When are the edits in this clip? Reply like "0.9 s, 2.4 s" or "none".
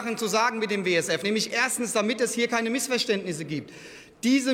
none